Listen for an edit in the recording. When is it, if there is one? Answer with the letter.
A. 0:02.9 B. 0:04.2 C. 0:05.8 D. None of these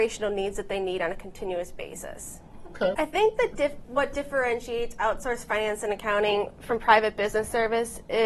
A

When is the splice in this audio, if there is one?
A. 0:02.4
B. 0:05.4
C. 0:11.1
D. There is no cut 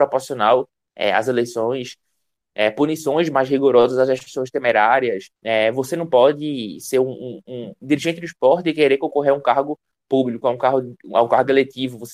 B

